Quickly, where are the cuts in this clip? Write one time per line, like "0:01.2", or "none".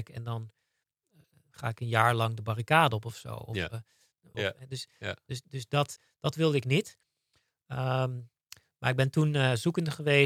0:04.3